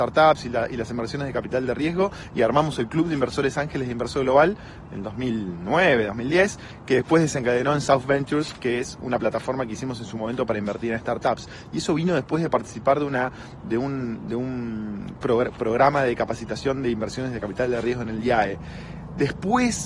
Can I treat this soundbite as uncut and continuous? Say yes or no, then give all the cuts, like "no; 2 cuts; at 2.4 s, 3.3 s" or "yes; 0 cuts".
yes; 0 cuts